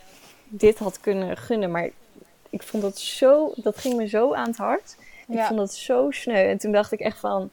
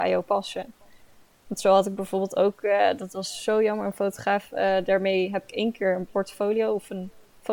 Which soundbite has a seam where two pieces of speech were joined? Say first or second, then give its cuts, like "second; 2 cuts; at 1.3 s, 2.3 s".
first; 1 cut; at 5.2 s